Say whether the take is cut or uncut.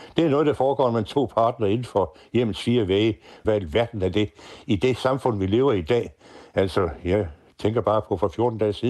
cut